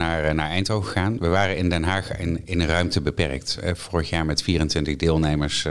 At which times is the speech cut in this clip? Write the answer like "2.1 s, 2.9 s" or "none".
none